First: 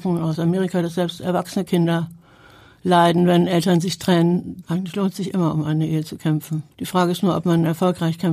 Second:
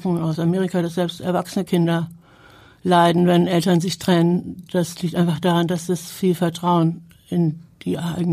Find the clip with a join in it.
first; 2 cuts; at 4.6 s, 6.7 s

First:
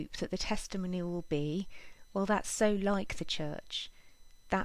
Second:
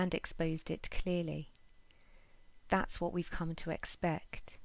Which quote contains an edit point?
second; 1 cut; at 2.6 s

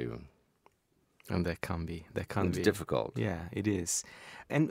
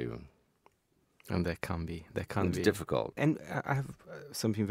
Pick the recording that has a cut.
second; 1 cut; at 3.1 s

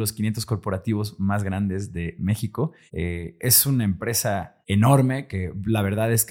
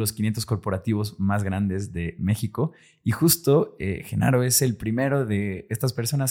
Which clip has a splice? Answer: first; 2 cuts; at 2.9 s, 4.6 s

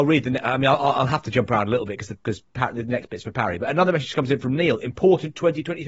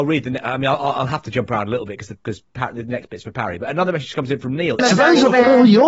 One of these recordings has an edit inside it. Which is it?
second; 1 cut; at 4.8 s

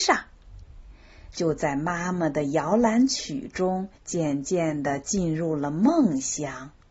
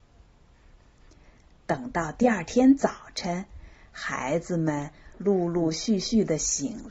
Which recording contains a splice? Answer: first; 2 cuts; at 1.3 s, 3.9 s

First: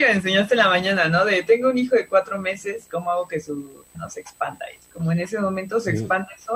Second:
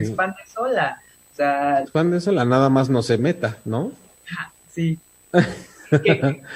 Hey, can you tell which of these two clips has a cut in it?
first; 1 cut; at 3.9 s

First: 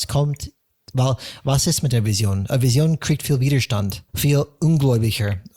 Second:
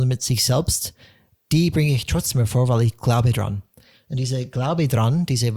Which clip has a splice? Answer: first; 1 cut; at 4.1 s

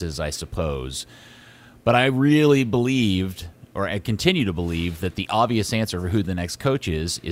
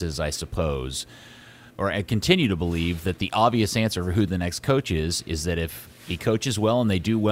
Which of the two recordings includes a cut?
second; 1 cut; at 1.7 s

